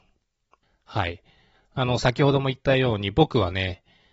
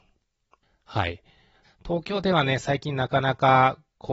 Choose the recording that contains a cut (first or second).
second